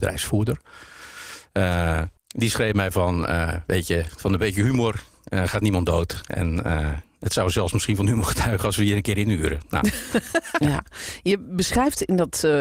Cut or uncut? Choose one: cut